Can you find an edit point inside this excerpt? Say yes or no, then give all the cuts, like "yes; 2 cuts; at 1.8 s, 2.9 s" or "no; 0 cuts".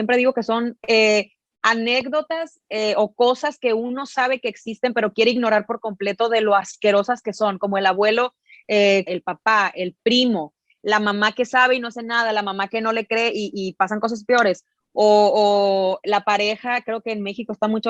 yes; 1 cut; at 9.1 s